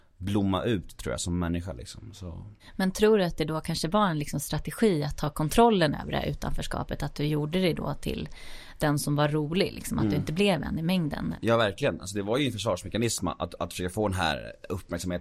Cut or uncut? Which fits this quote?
uncut